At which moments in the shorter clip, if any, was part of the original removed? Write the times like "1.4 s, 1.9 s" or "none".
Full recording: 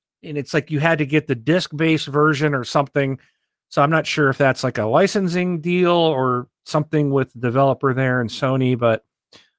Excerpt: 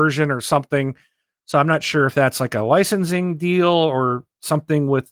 none